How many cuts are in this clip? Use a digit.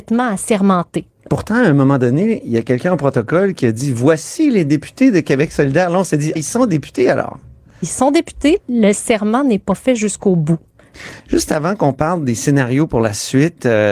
3